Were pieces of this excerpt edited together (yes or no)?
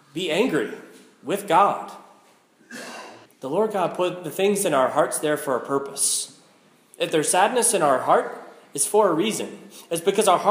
yes